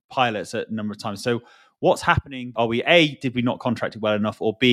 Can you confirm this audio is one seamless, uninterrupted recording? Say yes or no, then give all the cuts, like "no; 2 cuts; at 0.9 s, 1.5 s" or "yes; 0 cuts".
yes; 0 cuts